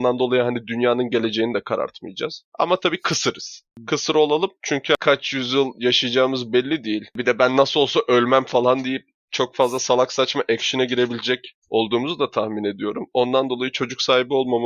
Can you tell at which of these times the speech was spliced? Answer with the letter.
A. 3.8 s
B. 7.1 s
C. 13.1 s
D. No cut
D